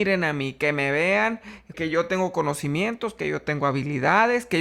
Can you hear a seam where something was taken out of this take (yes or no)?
yes